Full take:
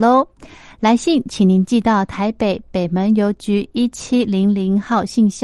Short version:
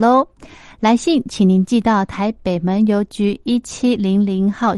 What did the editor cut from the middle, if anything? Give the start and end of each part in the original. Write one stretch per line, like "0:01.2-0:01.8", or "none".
0:02.3-0:02.6